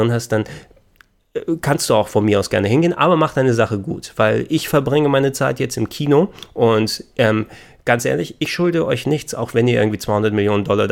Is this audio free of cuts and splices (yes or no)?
yes